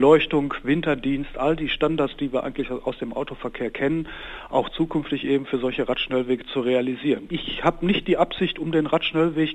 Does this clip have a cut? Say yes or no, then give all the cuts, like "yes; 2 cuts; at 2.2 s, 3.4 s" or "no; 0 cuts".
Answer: yes; 1 cut; at 7.3 s